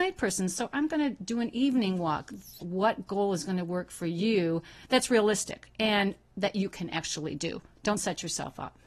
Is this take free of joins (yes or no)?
no